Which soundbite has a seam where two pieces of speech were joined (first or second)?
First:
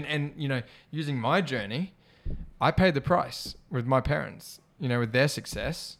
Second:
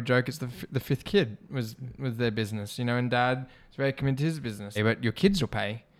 second